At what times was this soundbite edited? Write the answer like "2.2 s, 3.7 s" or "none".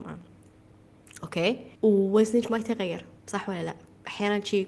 1.8 s, 3.2 s